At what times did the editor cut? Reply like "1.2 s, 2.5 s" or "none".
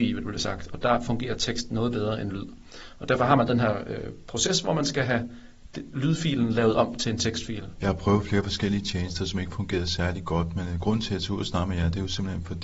7.8 s